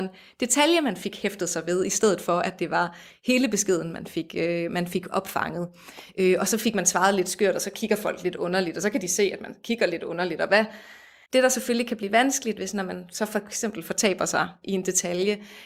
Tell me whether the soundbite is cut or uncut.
cut